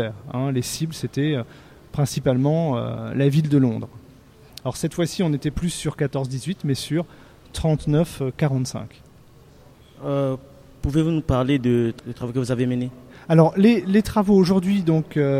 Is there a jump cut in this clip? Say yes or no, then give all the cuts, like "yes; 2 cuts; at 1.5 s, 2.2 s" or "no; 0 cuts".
yes; 1 cut; at 4.5 s